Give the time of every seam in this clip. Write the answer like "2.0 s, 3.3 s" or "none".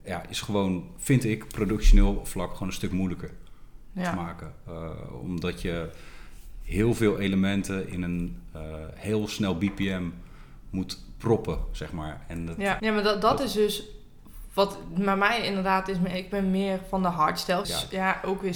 12.8 s, 17.6 s

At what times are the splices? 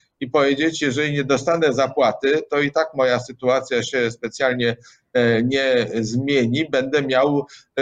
none

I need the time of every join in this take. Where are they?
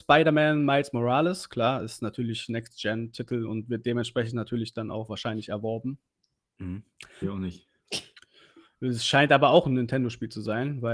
7.2 s

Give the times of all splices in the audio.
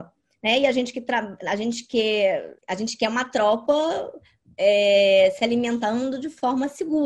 2.6 s

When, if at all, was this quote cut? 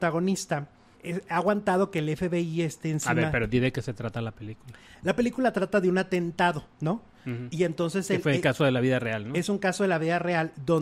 0.9 s

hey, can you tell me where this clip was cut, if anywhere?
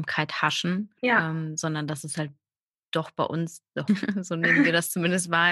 1.0 s, 3.9 s

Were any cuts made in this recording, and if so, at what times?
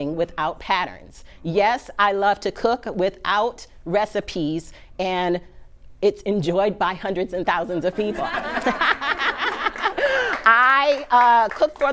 none

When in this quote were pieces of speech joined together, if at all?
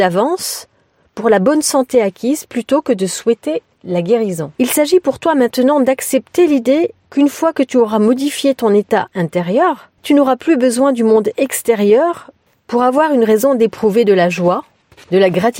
4.5 s, 10.0 s

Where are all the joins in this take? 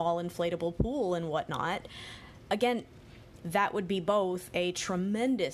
3.4 s

